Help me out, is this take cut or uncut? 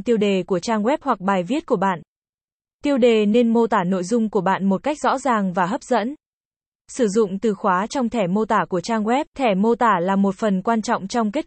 cut